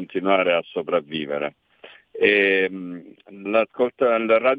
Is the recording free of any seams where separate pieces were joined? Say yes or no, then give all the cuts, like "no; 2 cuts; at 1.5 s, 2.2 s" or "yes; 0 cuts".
no; 1 cut; at 3.5 s